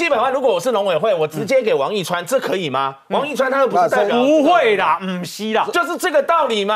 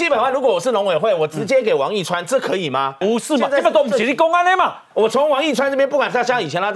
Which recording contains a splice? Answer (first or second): second